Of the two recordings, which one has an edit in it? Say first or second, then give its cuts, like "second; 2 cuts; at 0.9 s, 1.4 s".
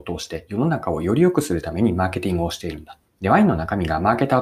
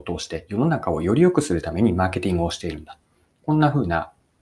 first; 1 cut; at 3.1 s